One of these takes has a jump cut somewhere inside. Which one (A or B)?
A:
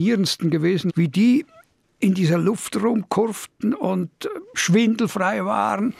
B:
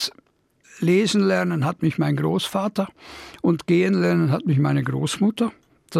A